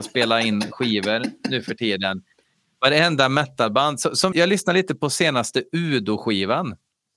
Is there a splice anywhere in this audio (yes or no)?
yes